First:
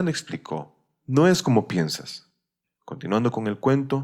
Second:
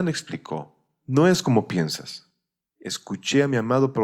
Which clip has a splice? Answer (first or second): first